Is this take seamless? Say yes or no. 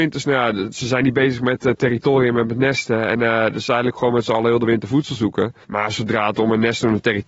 no